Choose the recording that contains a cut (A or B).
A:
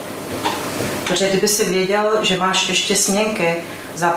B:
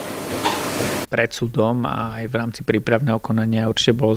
B